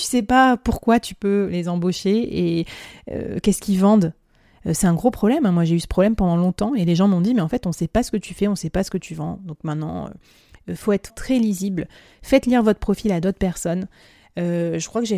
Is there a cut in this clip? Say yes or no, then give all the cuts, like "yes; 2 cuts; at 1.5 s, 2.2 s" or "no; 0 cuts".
yes; 1 cut; at 11.1 s